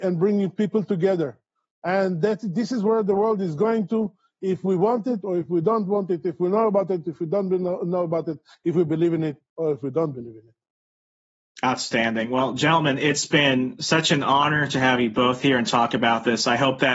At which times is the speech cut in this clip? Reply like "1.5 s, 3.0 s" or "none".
none